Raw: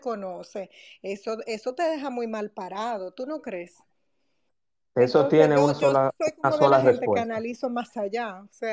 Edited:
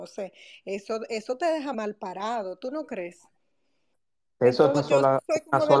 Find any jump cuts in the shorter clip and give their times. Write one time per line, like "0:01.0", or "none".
0:01.7
0:04.7